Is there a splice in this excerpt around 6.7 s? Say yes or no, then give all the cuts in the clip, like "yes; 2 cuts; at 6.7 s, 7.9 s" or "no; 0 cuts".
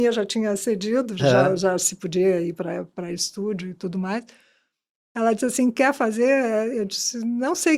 no; 1 cut; at 1.2 s